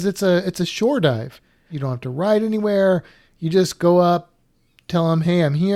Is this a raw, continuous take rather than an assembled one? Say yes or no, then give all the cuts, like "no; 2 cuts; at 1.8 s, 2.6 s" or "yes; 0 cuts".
no; 1 cut; at 1.7 s